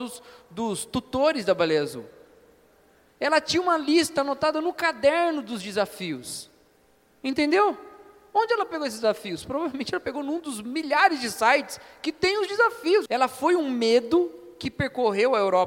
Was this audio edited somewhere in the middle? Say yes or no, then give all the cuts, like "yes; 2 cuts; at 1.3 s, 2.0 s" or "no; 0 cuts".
yes; 1 cut; at 13.1 s